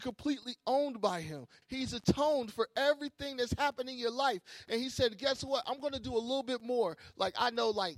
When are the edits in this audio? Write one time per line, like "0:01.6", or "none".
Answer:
0:01.6